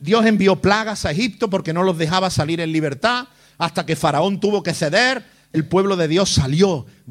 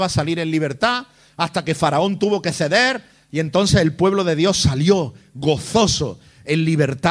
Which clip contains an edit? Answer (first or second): first